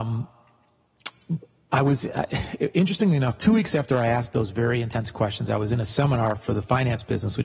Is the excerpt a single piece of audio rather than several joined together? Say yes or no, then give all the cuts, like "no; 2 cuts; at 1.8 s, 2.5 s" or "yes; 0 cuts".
yes; 0 cuts